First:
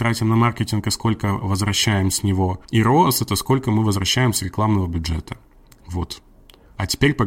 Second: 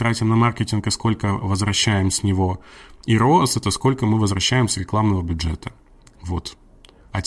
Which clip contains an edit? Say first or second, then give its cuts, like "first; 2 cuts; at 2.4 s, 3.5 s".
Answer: first; 1 cut; at 2.6 s